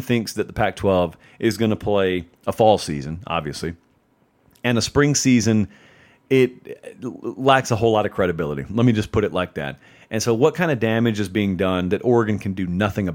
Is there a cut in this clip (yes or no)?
no